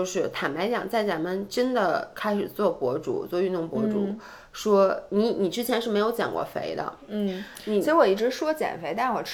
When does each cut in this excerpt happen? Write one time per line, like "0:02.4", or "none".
none